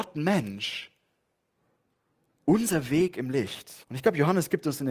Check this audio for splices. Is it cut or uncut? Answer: cut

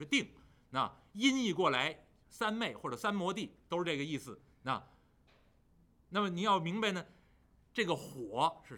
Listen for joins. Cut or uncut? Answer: uncut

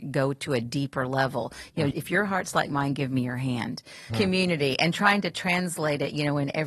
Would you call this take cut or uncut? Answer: cut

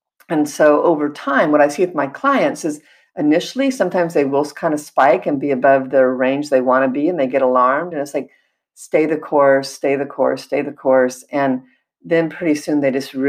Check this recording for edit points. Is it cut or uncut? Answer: uncut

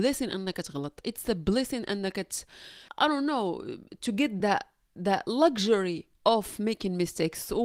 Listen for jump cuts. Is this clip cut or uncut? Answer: cut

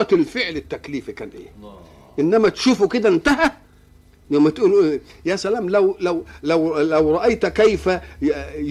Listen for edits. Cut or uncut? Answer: uncut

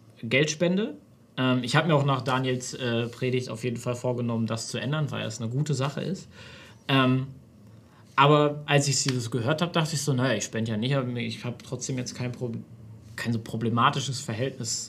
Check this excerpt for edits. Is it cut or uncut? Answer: uncut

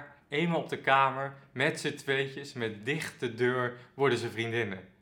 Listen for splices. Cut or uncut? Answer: uncut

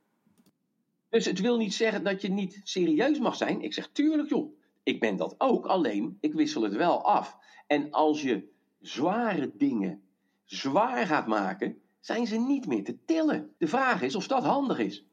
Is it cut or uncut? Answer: cut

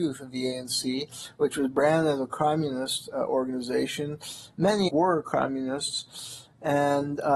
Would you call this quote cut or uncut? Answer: cut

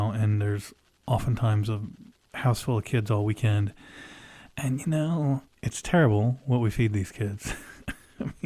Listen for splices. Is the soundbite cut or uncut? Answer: cut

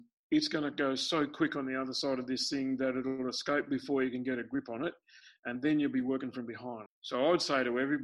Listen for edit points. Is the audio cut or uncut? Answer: cut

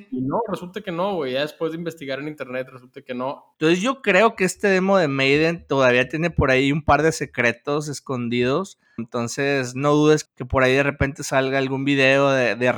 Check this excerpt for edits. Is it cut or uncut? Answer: cut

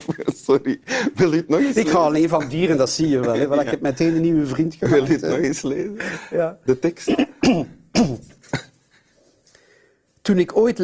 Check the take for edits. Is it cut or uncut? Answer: uncut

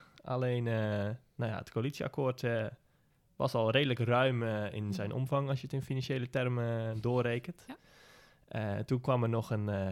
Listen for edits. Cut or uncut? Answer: uncut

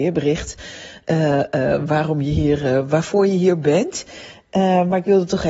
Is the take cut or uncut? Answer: uncut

